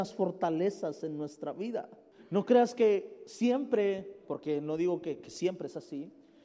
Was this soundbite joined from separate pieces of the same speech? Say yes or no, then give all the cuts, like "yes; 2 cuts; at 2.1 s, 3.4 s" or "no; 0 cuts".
no; 0 cuts